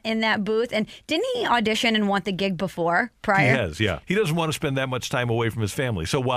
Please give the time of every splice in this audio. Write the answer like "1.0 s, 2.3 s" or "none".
4.0 s